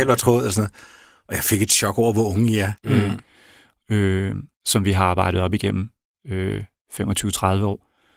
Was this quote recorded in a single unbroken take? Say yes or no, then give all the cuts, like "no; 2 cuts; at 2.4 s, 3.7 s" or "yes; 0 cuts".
no; 2 cuts; at 2.8 s, 4.5 s